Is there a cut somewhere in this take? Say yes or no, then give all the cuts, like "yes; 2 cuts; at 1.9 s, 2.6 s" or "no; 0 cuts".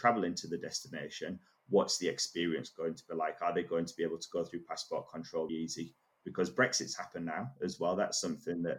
yes; 1 cut; at 5.5 s